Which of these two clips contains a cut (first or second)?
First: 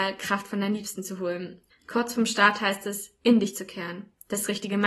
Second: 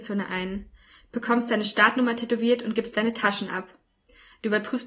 first